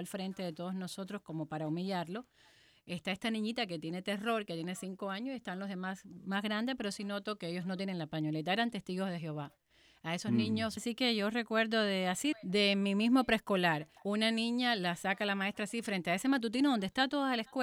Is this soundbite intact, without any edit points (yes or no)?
no